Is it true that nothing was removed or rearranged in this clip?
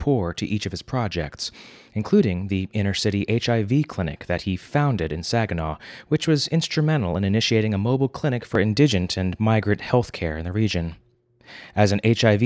yes; 0 cuts

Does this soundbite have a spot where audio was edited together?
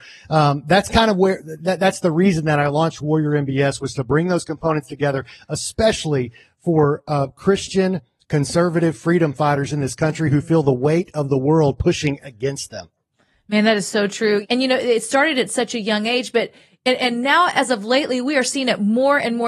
yes; 1 cut; at 14.4 s

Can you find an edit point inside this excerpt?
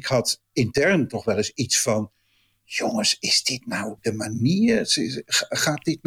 no; 0 cuts

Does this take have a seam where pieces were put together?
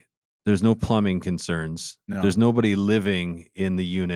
no; 0 cuts

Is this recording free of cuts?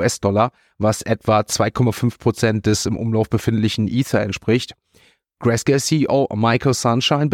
yes; 0 cuts

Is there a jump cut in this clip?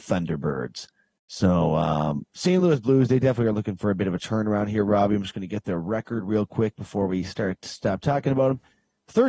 no; 0 cuts

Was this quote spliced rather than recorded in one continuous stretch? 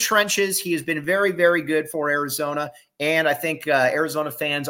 no; 0 cuts

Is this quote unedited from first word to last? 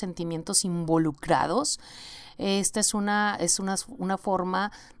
yes; 0 cuts

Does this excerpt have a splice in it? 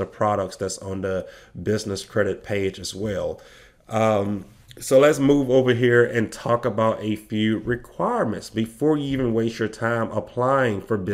no; 0 cuts

